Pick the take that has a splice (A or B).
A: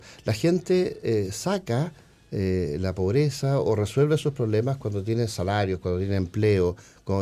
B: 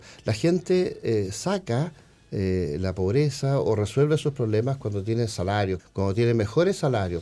B